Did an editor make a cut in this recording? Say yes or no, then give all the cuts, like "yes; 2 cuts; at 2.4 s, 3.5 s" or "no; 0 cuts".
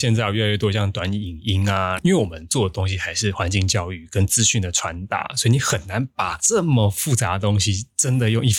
no; 0 cuts